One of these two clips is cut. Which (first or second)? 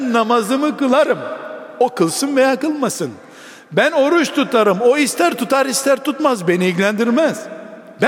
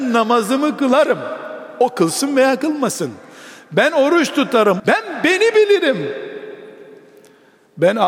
second